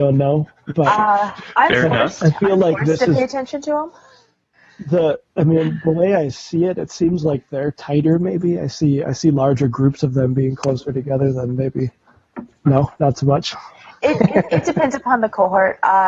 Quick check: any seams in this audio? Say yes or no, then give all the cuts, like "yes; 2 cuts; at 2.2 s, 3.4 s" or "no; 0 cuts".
no; 0 cuts